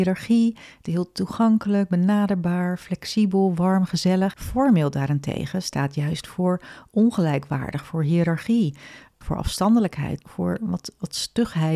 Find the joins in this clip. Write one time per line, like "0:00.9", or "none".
0:04.3
0:10.2